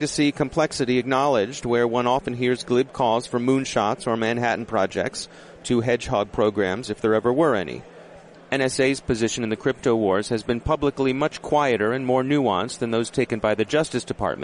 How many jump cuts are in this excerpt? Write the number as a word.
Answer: one